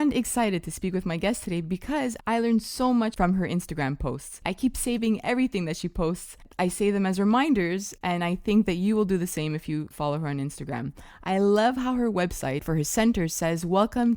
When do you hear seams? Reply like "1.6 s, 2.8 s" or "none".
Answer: 2.2 s

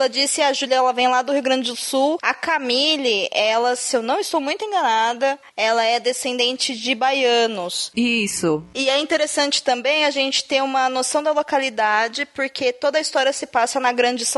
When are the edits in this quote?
none

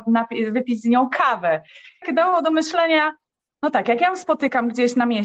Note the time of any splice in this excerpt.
2.0 s

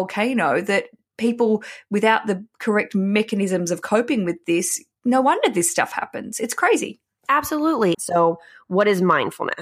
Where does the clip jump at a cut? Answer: 7.9 s

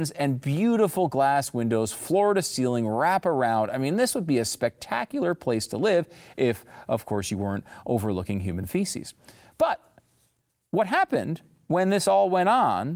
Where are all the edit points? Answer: none

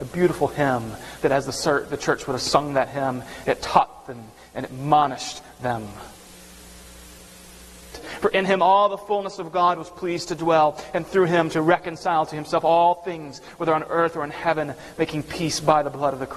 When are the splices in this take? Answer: 7.9 s

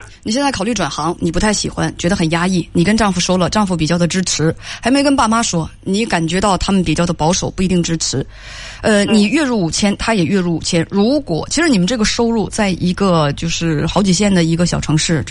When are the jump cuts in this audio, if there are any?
1.2 s

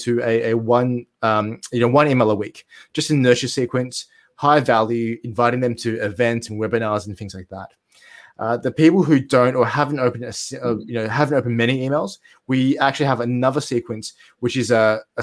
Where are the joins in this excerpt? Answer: none

